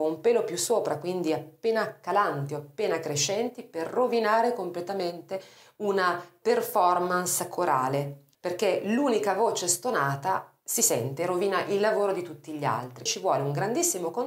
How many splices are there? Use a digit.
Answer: 2